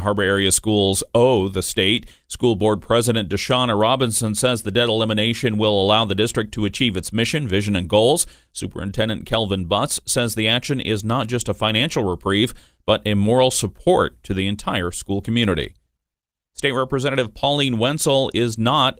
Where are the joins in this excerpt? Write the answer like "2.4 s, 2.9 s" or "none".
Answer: none